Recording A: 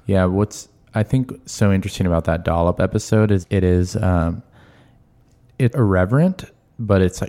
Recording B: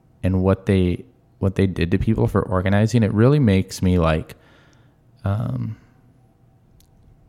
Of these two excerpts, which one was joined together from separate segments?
A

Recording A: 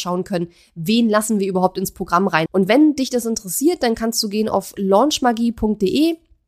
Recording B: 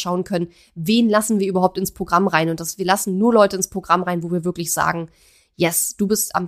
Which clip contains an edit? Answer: A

